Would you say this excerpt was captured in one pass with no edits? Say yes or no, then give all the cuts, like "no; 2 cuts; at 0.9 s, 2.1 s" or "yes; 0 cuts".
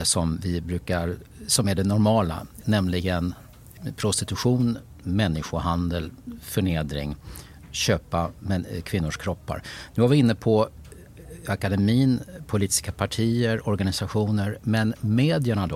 no; 1 cut; at 2.6 s